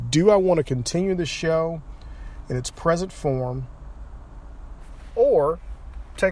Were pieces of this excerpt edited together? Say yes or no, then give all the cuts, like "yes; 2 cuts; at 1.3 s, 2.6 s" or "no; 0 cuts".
yes; 1 cut; at 5.1 s